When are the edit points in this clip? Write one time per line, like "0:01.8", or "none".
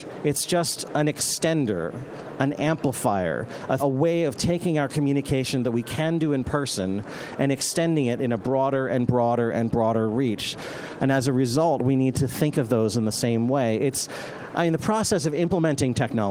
0:03.8
0:11.0